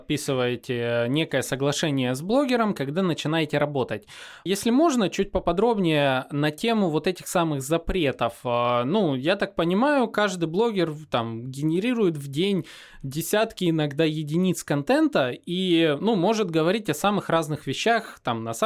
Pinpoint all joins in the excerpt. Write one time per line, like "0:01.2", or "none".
none

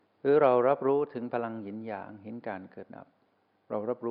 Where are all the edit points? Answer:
0:02.9

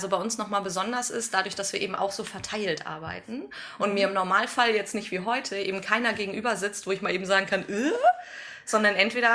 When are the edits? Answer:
none

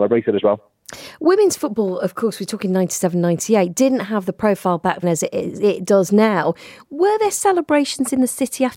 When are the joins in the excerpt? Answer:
0:05.0

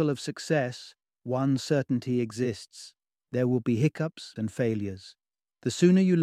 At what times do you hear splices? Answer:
0:04.4

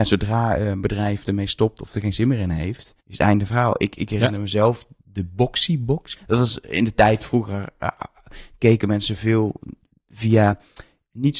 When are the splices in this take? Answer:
0:03.0
0:06.2

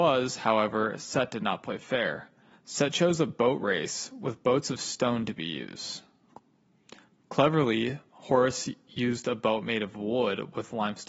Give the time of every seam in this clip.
0:02.5

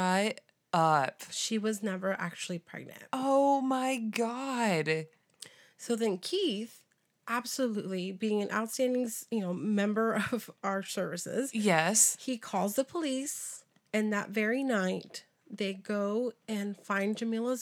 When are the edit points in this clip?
none

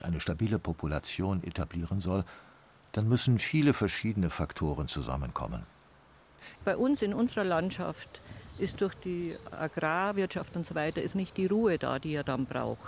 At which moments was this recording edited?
0:06.6
0:11.1

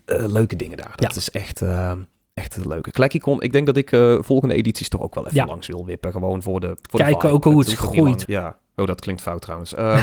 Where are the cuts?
0:08.2

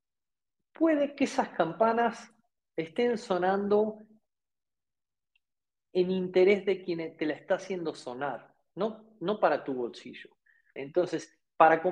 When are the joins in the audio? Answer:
0:10.8

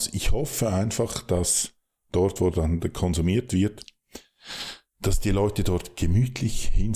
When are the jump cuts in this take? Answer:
none

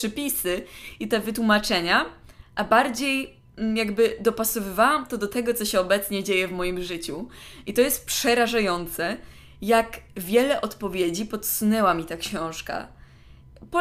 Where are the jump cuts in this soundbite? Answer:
none

